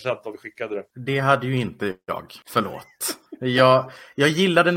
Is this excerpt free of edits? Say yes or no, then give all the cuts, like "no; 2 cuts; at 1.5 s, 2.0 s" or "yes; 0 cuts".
yes; 0 cuts